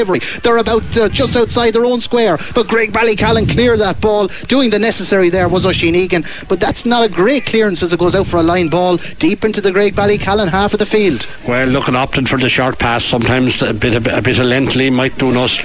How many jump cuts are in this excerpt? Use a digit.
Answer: 1